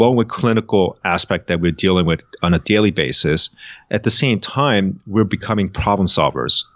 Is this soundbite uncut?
yes; 0 cuts

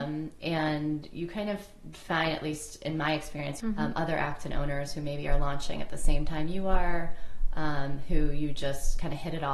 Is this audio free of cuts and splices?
no; 1 cut; at 3.6 s

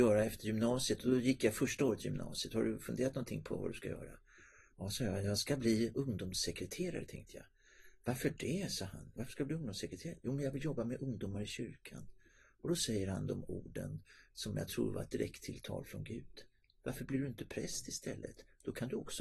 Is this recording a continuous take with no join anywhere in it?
yes; 0 cuts

